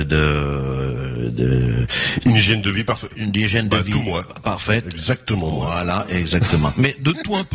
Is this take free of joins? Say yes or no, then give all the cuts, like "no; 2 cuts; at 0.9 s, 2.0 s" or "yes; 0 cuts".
yes; 0 cuts